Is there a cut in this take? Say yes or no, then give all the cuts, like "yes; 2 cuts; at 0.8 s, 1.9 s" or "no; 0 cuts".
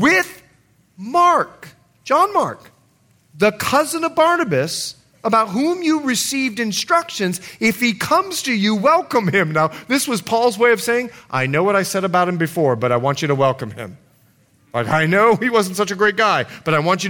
no; 0 cuts